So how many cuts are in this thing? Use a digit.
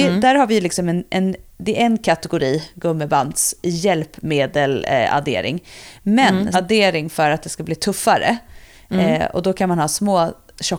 1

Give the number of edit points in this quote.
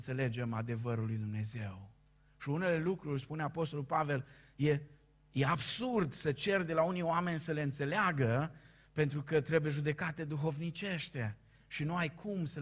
0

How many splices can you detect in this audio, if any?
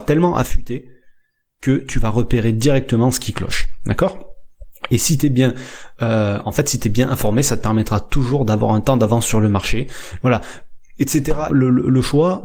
2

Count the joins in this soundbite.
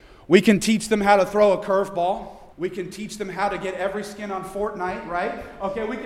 1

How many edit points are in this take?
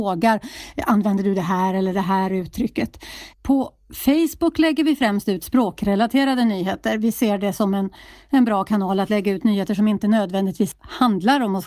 1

